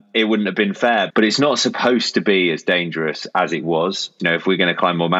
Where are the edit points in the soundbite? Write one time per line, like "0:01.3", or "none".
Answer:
0:01.1
0:04.2